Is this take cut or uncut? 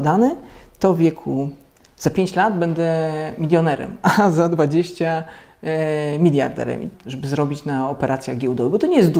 cut